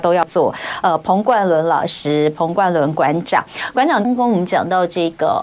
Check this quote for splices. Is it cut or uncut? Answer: cut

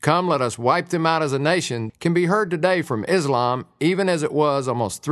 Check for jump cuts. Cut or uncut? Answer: cut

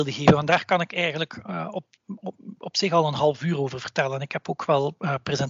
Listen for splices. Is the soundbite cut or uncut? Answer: uncut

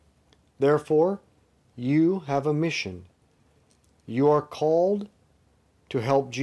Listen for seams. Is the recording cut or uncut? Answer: uncut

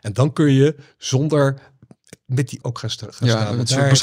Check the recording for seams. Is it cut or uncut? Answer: cut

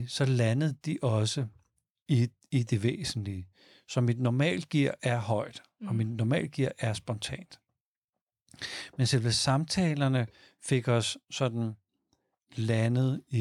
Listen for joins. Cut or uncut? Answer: uncut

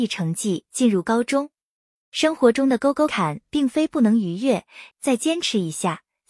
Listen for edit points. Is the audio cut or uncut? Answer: cut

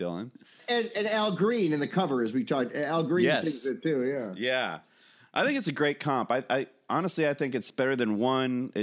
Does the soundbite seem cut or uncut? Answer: uncut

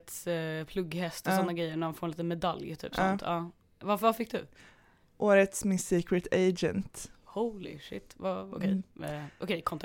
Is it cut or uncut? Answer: uncut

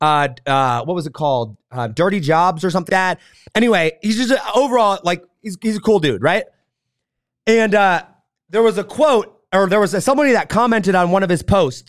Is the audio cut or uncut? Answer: cut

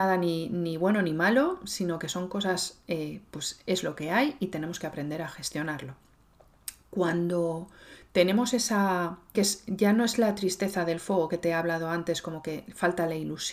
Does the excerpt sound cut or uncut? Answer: cut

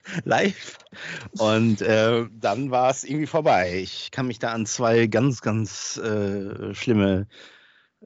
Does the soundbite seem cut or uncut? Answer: uncut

